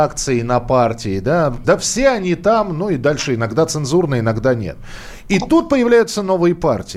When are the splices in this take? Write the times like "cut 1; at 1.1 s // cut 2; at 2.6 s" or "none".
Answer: cut 1; at 1.6 s